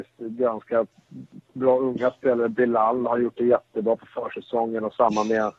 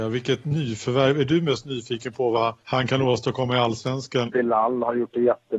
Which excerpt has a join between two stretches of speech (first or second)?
second